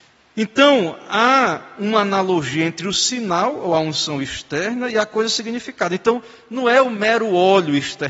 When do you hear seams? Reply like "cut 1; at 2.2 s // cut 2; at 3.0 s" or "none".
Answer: none